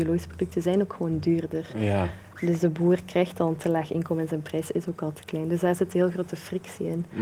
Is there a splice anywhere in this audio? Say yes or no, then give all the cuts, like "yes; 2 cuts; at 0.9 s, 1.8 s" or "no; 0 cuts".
no; 0 cuts